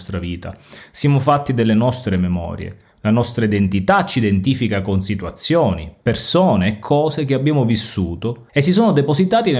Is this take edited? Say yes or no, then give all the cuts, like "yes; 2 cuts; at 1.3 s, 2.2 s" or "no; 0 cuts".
yes; 1 cut; at 8.5 s